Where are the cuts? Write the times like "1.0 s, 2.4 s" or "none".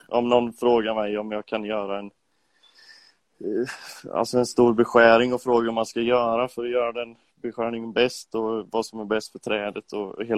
none